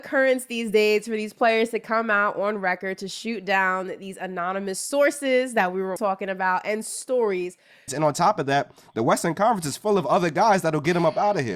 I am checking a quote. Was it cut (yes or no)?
yes